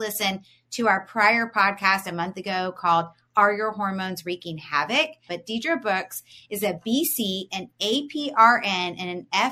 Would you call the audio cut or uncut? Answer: cut